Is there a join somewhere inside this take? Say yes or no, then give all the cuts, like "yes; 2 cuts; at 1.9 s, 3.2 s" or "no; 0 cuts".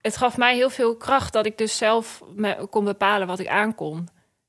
no; 0 cuts